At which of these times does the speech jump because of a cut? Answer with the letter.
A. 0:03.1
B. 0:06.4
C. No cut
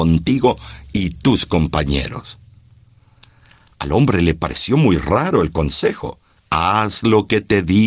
B